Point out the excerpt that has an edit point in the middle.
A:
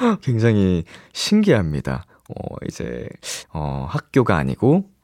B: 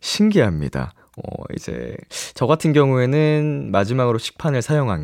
A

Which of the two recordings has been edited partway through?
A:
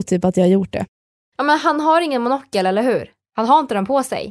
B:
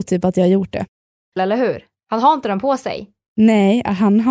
B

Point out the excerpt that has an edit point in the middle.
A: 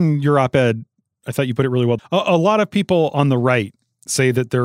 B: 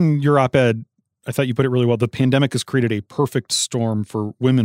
A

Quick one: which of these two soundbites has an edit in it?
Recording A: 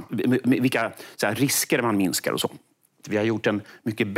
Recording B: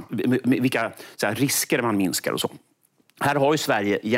A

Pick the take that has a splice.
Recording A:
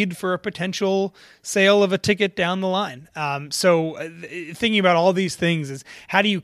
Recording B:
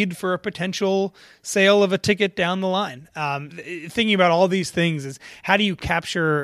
B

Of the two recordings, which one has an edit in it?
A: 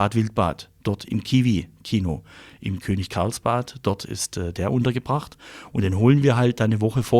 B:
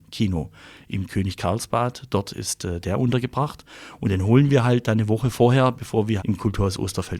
B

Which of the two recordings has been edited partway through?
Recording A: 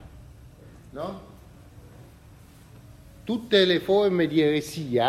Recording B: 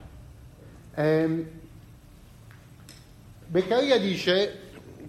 B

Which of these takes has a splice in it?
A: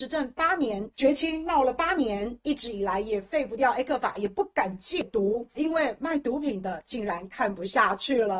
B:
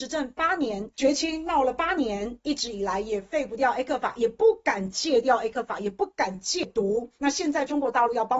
A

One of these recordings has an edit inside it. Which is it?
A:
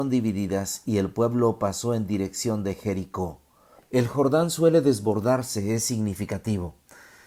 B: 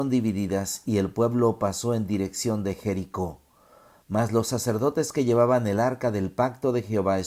A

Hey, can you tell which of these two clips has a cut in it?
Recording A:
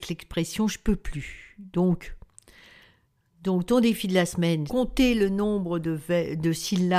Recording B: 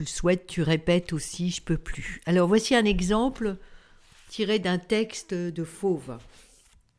A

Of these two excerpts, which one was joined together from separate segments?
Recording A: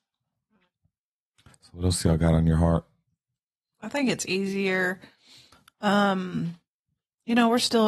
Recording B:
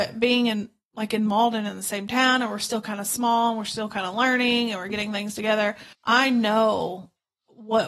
B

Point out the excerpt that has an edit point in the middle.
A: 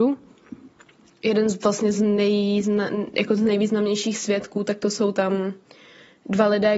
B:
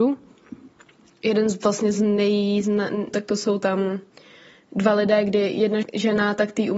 B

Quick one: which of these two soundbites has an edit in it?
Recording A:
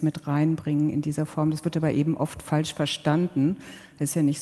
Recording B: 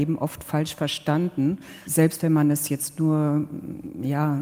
B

